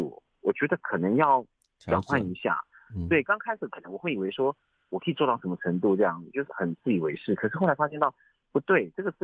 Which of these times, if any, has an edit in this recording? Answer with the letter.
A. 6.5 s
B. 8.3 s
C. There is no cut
A